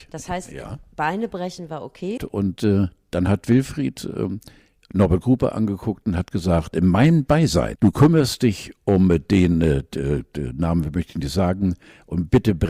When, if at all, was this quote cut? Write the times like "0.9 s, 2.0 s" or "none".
2.2 s, 7.8 s